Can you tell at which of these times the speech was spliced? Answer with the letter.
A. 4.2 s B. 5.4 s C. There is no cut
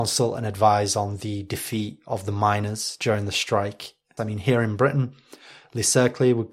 A